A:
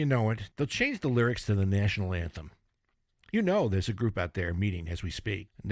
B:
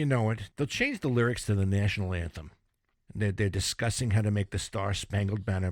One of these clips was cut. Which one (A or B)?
B